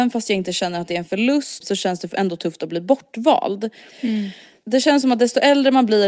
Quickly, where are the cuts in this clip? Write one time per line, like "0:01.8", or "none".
0:01.6
0:03.9